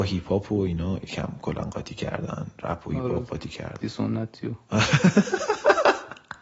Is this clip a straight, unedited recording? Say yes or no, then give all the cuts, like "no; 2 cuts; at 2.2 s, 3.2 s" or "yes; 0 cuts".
no; 1 cut; at 3.8 s